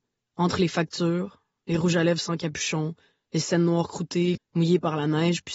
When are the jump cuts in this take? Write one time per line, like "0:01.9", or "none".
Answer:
0:04.3